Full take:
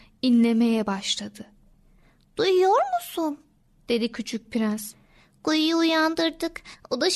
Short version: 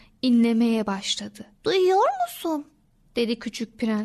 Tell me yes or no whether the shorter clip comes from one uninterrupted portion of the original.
no